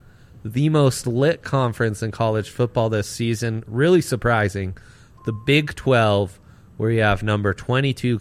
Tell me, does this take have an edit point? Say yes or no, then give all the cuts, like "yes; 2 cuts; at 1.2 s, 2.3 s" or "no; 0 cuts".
no; 0 cuts